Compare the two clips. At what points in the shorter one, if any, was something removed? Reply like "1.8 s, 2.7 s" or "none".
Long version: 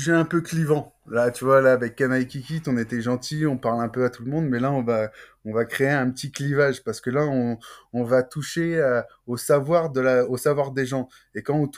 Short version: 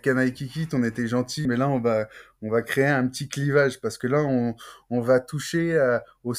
1.5 s

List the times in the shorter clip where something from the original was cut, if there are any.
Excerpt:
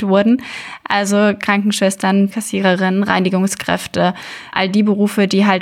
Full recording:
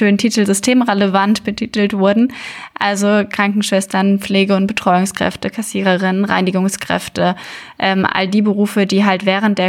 2.3 s, 4.5 s

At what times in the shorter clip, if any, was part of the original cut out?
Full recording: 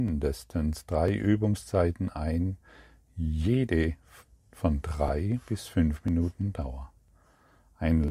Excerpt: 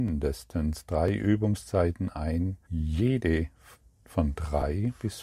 2.6 s

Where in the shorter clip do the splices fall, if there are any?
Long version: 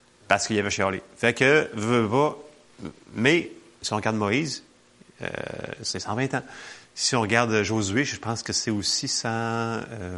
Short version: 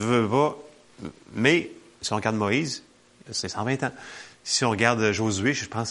3.3 s

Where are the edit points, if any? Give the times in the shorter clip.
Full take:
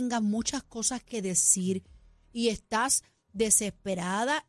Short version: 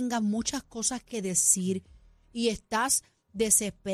none

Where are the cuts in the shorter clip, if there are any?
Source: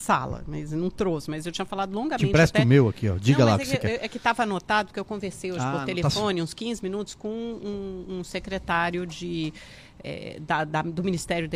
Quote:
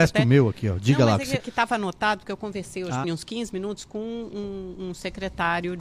1.4 s, 3.0 s

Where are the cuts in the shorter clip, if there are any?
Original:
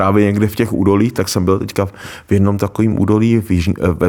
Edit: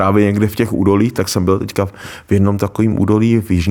none

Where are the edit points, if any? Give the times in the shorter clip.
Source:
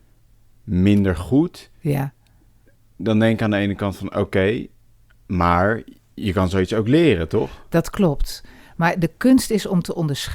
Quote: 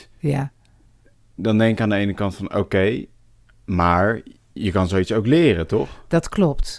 none

